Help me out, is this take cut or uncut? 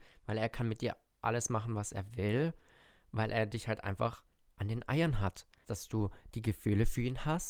cut